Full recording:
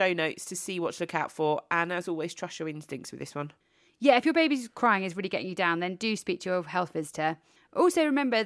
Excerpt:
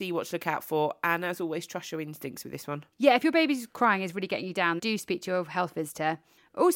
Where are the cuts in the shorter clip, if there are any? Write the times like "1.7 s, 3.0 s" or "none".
2.9 s, 4.8 s